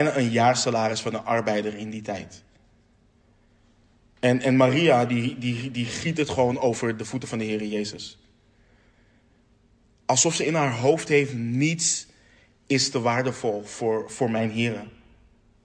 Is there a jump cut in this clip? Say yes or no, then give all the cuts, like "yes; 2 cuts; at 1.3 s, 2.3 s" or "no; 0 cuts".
no; 0 cuts